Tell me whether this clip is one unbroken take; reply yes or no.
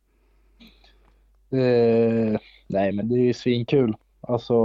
no